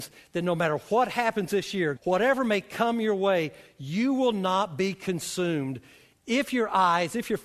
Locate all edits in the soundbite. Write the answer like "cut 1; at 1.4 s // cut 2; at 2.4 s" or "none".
cut 1; at 2.0 s

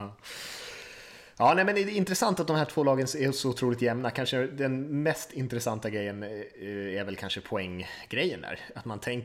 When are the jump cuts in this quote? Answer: none

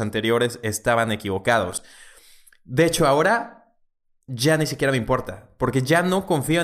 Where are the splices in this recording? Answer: none

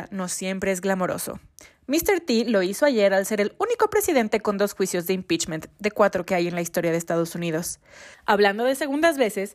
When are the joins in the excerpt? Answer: cut 1; at 8.1 s

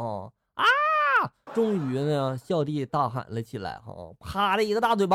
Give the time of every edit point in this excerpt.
cut 1; at 1.5 s

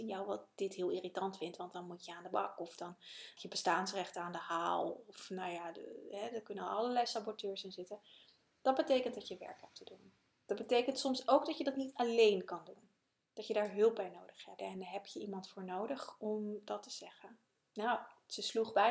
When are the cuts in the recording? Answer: cut 1; at 3.4 s // cut 2; at 14.6 s // cut 3; at 17.6 s

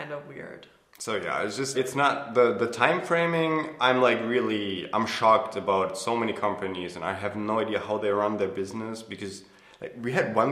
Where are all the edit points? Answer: cut 1; at 1.7 s

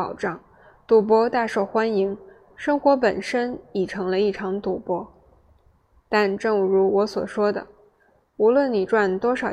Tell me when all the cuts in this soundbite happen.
none

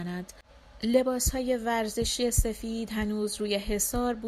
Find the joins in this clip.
none

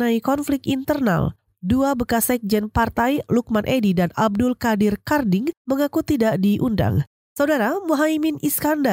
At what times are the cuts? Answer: cut 1; at 7.1 s

